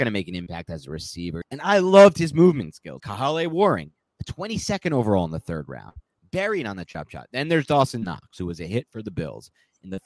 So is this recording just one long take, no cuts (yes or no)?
no